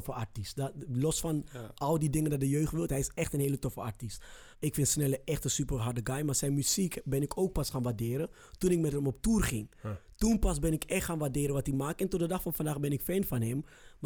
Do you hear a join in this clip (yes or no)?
yes